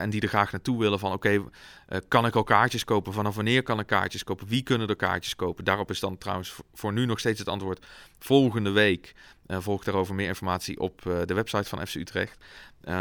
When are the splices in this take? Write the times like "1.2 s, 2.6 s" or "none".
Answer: none